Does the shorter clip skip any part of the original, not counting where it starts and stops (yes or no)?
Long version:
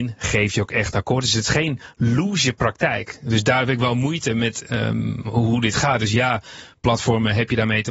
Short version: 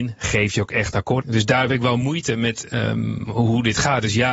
yes